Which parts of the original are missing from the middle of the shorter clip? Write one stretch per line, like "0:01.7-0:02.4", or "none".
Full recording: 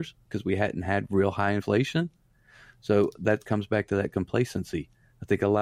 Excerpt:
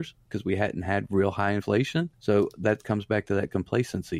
0:02.1-0:02.7